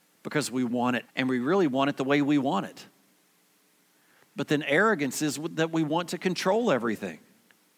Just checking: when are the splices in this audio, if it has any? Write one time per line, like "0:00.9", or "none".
0:01.0